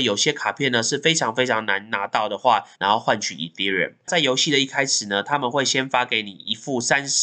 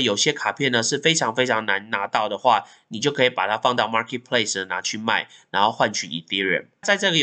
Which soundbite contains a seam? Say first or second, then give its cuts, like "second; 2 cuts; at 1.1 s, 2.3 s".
first; 2 cuts; at 2.7 s, 4.0 s